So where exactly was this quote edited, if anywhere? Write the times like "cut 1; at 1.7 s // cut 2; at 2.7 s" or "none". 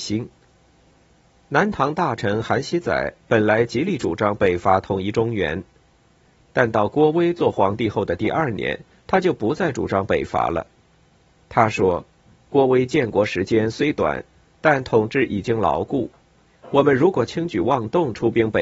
none